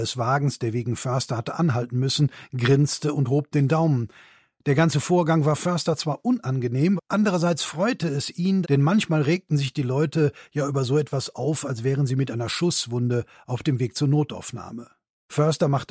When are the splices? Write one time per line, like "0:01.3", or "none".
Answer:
0:07.0
0:08.6